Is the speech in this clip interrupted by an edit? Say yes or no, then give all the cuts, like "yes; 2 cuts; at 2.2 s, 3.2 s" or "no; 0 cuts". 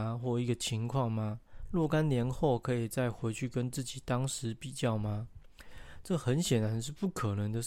no; 0 cuts